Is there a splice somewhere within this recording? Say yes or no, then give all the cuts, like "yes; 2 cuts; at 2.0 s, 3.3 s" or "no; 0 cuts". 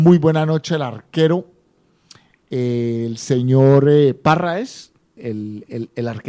yes; 1 cut; at 5.2 s